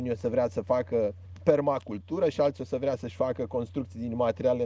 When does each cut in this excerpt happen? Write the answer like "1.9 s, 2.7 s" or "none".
none